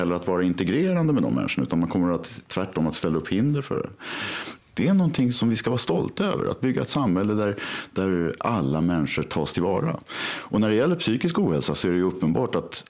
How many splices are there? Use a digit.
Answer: 1